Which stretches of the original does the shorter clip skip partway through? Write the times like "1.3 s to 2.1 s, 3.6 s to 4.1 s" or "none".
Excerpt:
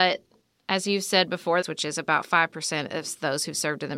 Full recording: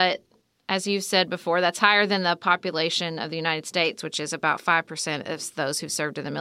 1.6 s to 4.0 s